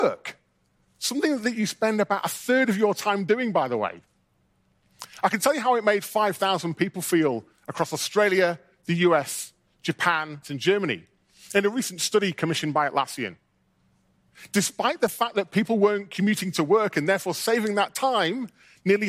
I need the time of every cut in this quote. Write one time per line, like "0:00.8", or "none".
0:10.4